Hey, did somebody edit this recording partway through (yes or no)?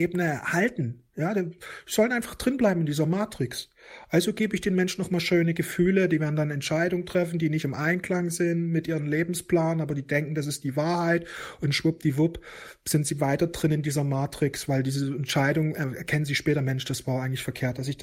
no